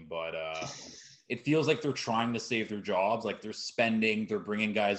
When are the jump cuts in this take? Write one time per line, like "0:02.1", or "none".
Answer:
none